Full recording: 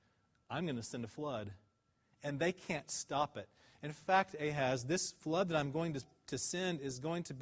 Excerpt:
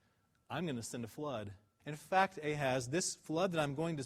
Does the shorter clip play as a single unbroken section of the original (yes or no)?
no